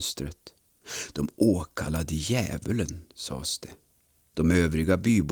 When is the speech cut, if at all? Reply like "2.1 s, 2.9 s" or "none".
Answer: 4.3 s